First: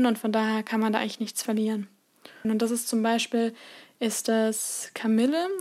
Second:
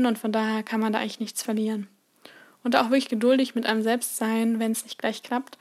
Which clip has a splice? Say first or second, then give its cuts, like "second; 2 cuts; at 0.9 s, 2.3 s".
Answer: first; 1 cut; at 2.4 s